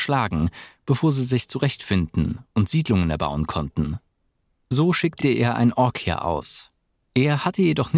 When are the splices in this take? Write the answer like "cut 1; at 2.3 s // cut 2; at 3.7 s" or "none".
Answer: none